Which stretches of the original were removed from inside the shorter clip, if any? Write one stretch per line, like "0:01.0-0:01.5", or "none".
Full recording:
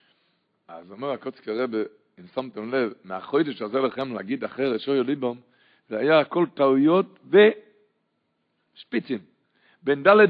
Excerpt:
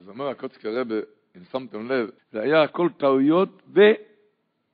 0:03.0-0:05.7